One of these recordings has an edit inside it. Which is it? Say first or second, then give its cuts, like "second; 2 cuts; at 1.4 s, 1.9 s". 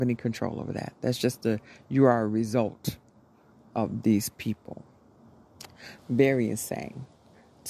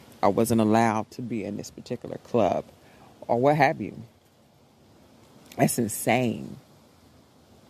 first; 1 cut; at 6.0 s